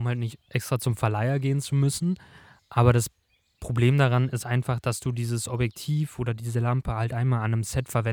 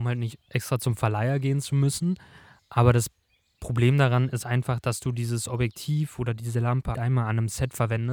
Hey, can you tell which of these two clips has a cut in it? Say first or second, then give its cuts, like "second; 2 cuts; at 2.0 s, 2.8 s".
second; 1 cut; at 6.9 s